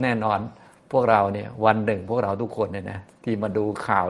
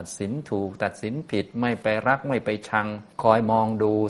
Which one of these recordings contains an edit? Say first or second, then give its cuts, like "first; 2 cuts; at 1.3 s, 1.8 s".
second; 1 cut; at 3.1 s